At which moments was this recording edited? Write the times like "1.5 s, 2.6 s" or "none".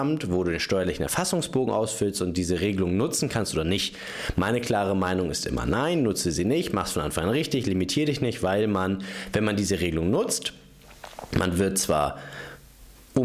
none